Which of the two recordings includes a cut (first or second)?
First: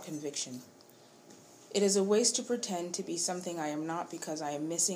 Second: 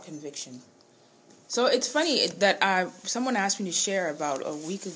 second